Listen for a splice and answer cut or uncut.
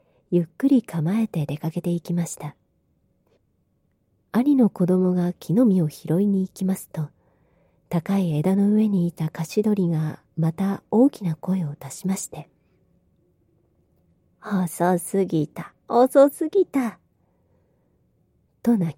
uncut